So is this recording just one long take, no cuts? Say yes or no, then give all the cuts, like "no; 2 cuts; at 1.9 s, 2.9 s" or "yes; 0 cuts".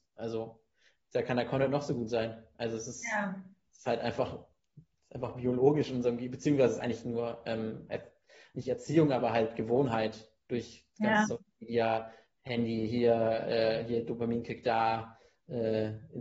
yes; 0 cuts